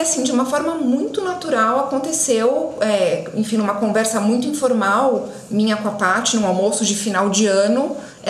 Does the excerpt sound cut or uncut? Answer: uncut